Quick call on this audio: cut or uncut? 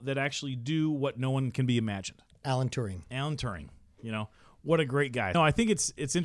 cut